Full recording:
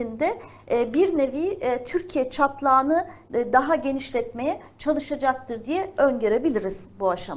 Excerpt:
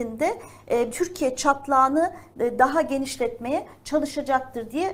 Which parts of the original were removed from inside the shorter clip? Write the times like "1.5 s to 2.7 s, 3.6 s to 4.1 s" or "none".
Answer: 0.9 s to 1.8 s